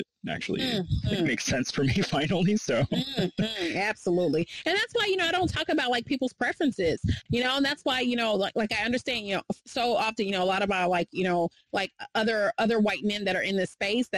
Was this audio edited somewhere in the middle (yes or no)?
no